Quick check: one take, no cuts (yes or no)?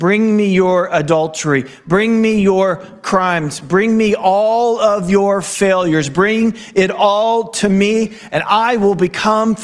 yes